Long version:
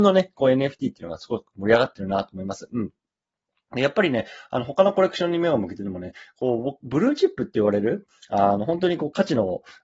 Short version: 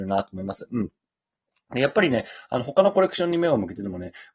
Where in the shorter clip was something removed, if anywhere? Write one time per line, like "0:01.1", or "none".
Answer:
none

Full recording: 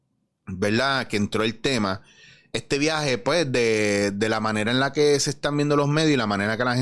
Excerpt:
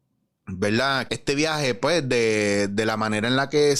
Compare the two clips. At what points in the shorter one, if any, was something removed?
0:01.1

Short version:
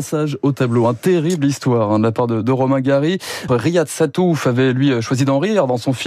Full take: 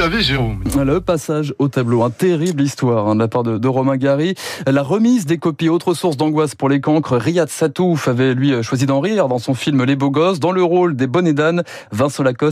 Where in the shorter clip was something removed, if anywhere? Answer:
0:03.5

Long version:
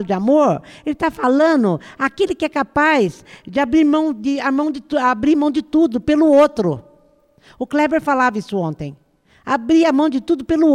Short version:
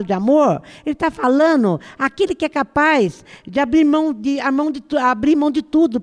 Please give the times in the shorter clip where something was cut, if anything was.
none

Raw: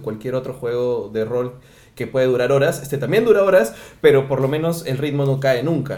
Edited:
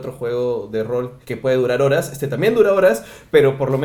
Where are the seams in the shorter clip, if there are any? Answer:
0:01.2

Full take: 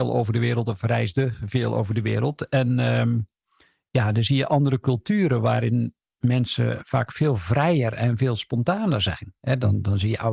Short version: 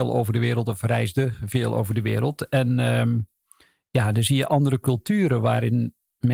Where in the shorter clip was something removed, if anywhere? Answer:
none

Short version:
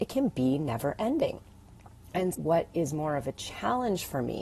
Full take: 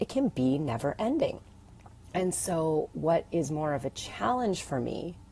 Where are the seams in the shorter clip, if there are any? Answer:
0:02.3

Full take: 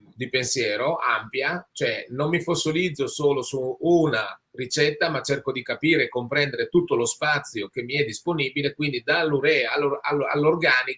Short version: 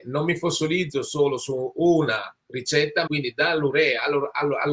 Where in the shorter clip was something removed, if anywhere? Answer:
0:03.1

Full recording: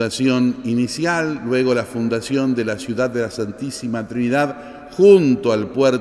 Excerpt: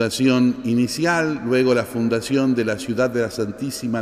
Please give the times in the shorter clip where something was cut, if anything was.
none

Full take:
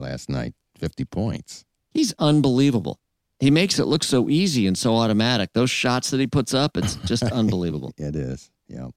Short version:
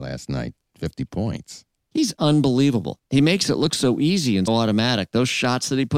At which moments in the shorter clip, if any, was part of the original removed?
0:03.1
0:04.5

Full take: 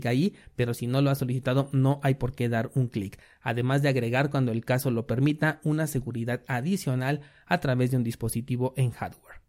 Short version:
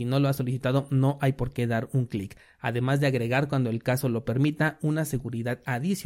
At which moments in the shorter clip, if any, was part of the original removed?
none

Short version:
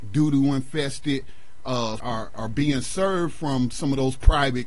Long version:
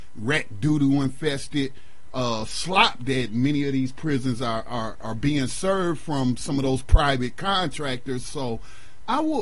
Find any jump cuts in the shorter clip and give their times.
0:02.0

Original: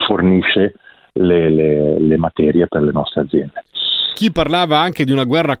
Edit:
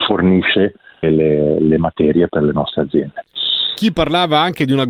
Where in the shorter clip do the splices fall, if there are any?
0:01.0

